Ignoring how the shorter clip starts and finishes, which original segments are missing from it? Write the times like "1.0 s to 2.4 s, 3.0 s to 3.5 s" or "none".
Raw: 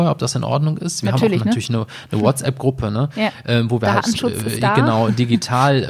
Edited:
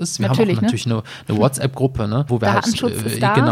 3.1 s to 3.7 s